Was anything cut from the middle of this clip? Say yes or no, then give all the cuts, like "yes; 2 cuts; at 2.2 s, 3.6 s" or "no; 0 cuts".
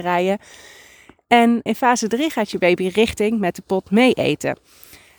yes; 1 cut; at 1.7 s